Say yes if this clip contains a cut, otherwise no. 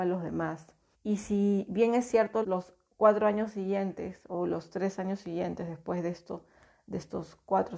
yes